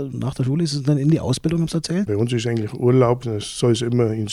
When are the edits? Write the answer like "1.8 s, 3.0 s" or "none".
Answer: 2.1 s, 3.2 s